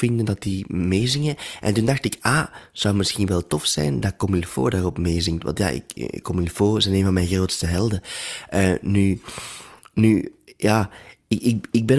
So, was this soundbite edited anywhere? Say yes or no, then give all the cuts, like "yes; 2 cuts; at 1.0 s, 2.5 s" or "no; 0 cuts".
no; 0 cuts